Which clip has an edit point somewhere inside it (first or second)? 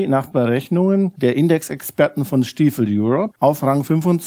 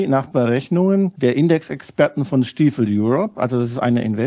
first